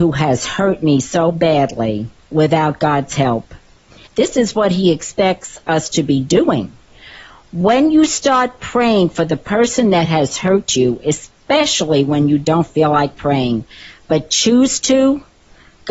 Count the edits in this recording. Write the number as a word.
one